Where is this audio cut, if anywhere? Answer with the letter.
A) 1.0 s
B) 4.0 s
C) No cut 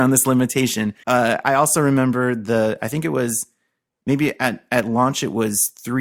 A